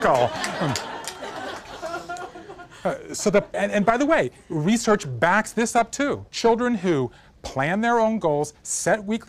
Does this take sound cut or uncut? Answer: cut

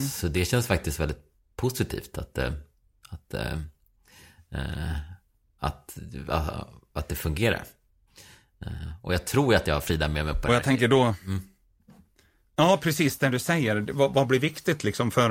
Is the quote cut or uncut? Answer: uncut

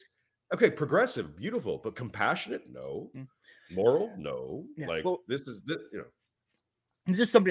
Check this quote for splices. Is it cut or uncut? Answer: uncut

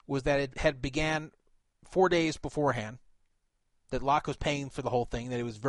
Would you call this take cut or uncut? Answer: uncut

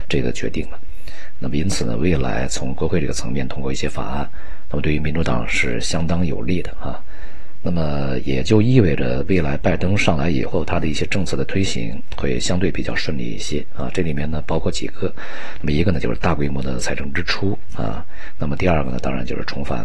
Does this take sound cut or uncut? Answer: uncut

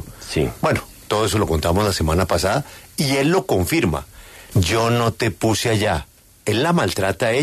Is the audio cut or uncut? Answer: cut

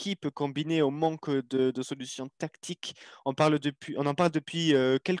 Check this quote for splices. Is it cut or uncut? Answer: uncut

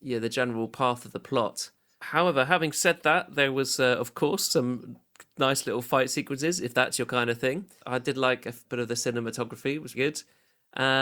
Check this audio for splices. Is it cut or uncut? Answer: cut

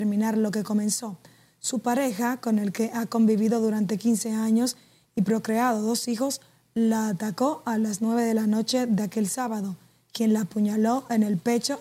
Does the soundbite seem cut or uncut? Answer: uncut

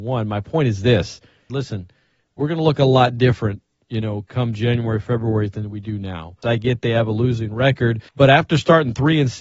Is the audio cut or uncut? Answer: cut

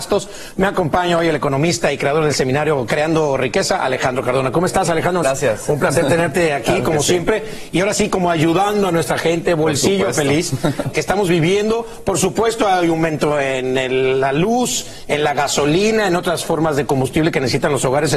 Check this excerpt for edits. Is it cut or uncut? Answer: cut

